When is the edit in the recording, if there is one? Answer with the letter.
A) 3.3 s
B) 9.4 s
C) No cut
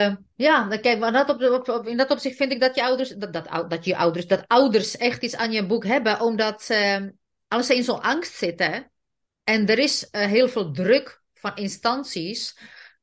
C